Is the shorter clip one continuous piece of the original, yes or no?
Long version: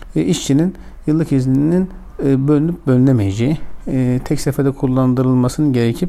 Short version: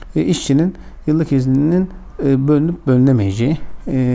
yes